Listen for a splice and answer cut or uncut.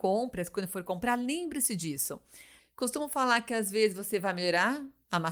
cut